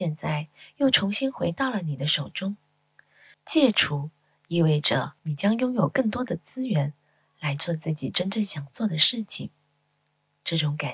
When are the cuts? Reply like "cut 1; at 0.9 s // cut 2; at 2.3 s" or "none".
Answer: cut 1; at 3.3 s // cut 2; at 5.2 s